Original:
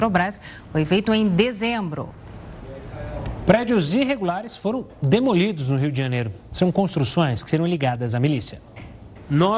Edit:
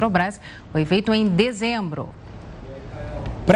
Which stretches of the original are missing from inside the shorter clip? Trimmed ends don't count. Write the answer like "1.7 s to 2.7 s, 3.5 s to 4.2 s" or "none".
none